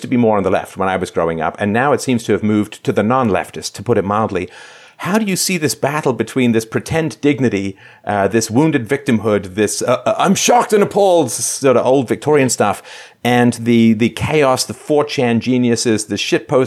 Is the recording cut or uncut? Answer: uncut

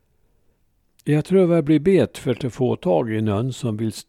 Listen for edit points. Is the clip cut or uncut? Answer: uncut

